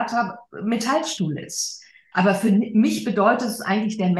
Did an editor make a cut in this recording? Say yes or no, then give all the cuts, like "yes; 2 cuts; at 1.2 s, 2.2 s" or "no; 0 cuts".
yes; 1 cut; at 2.1 s